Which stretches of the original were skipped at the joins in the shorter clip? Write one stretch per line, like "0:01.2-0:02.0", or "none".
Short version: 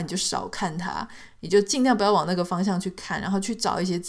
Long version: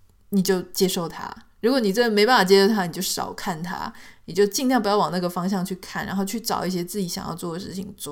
none